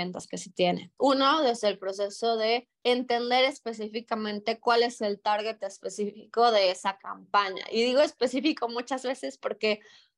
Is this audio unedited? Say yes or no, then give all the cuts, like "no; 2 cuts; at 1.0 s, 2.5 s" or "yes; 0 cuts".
no; 2 cuts; at 1.0 s, 2.8 s